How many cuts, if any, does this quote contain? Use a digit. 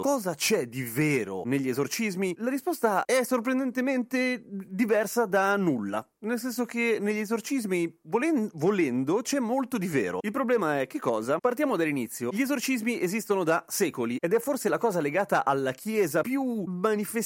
0